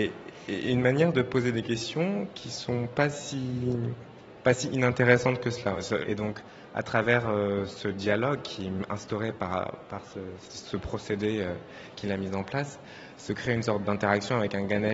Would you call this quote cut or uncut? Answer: cut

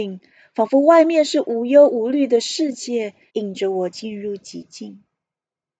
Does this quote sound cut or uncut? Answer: cut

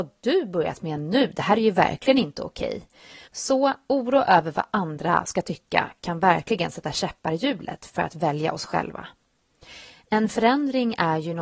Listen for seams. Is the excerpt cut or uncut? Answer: cut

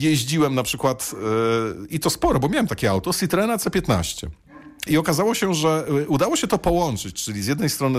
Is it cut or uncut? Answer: cut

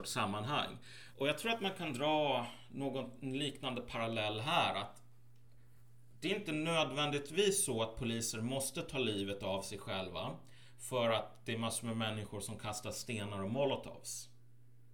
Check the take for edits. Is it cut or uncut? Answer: cut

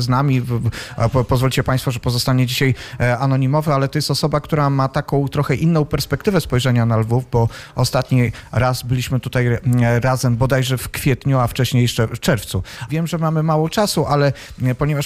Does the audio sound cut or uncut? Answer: cut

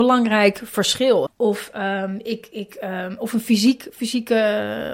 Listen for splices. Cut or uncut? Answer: cut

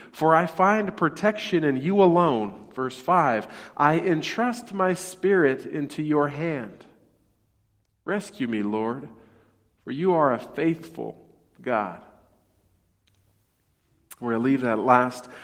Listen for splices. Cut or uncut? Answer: uncut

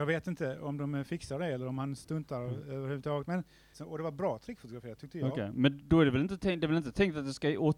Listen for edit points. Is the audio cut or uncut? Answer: cut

